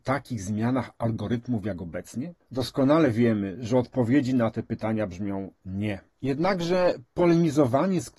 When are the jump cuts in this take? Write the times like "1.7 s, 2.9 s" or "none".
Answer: none